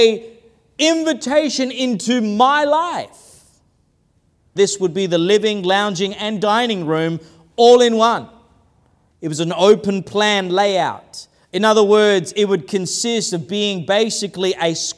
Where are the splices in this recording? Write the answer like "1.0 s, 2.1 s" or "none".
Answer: 4.6 s, 9.1 s